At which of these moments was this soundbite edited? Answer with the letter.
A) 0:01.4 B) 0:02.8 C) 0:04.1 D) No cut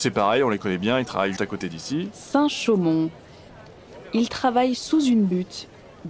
A